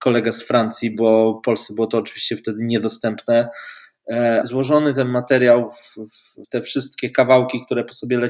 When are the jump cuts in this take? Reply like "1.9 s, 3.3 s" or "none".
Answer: 4.4 s, 6.4 s

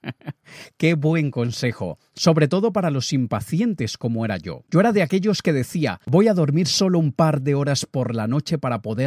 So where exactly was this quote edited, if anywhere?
6.1 s

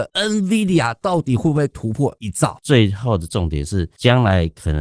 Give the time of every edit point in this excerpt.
2.6 s

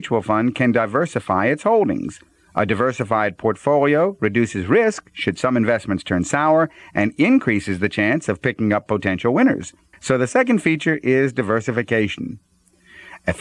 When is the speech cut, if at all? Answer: 9.9 s

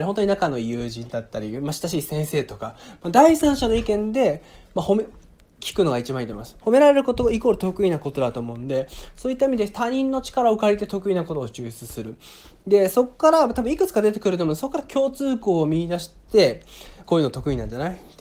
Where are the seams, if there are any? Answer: 6.6 s, 17.0 s

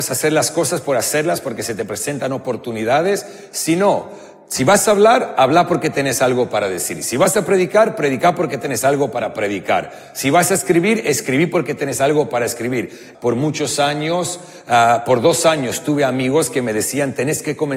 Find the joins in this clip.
13.1 s

